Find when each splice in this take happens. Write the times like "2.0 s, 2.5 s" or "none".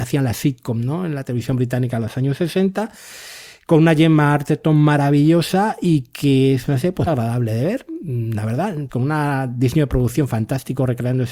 7.1 s, 8.9 s